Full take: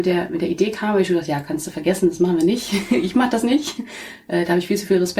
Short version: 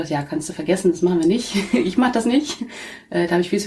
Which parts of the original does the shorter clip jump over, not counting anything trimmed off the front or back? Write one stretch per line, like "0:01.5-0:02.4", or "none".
none